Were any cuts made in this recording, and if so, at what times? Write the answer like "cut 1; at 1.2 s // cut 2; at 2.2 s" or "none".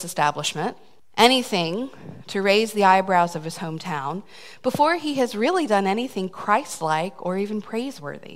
cut 1; at 1.0 s